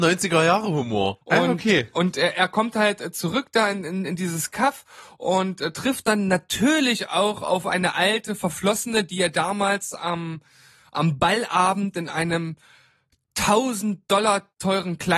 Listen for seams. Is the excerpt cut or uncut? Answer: cut